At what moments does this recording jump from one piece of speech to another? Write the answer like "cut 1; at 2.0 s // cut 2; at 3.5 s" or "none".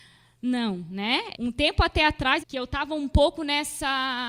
cut 1; at 1.3 s // cut 2; at 2.4 s